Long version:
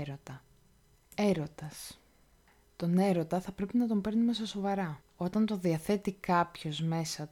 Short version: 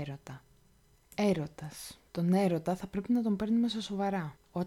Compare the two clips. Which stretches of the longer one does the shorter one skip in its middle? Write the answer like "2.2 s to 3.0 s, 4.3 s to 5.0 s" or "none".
2.1 s to 2.7 s